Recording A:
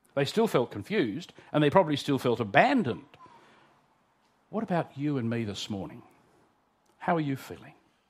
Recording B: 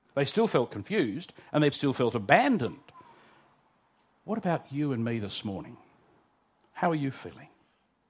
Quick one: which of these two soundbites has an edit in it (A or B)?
B